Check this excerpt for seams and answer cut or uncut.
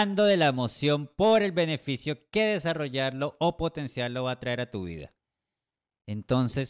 uncut